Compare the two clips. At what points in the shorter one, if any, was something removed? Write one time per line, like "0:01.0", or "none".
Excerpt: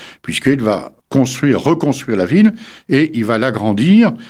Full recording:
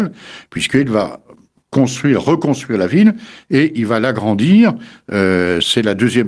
0:01.0